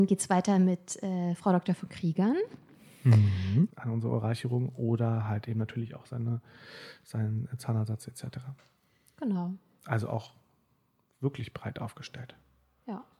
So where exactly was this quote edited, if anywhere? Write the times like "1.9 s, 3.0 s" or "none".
3.7 s